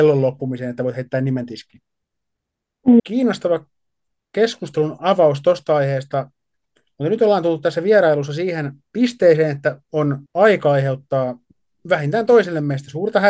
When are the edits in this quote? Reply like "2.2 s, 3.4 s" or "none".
3.0 s, 10.3 s